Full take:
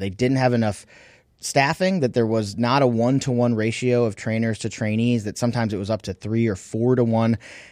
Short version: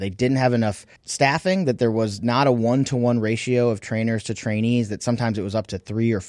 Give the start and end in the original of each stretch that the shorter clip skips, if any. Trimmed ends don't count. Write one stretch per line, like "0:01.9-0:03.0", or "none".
0:01.0-0:01.3

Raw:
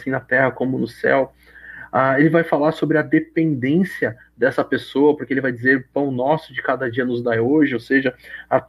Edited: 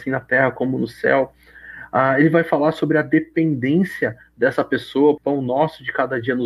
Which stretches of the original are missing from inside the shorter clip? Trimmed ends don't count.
0:05.2-0:05.9

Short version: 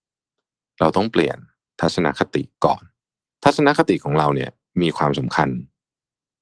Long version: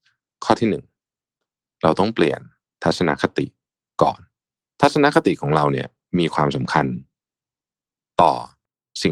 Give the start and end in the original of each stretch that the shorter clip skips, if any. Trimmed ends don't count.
0:03.6-0:03.9

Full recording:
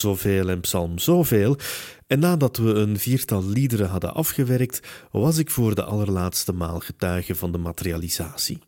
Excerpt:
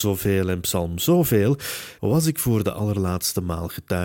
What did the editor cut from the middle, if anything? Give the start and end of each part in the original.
0:02.0-0:05.1

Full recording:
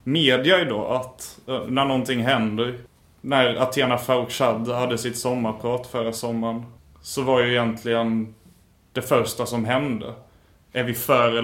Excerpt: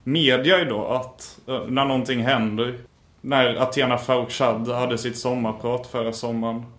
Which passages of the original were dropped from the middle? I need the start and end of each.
none

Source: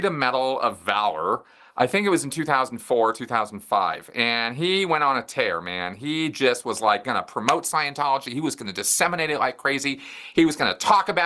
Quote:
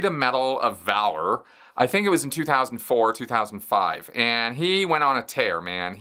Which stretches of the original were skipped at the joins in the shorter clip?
none

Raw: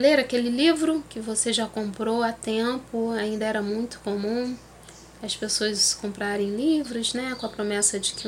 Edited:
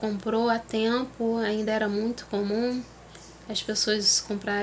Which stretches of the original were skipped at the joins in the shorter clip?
none

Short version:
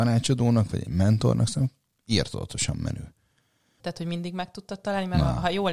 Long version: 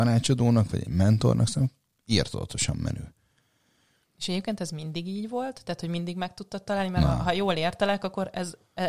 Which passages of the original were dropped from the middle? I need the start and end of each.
0:03.8-0:05.6

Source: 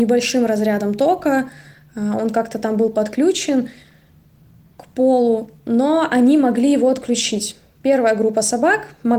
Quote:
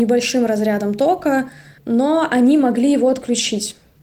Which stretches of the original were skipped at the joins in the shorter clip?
0:01.8-0:05.6

